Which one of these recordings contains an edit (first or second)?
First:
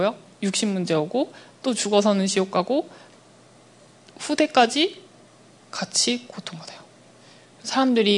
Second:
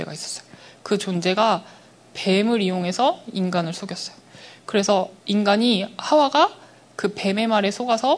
second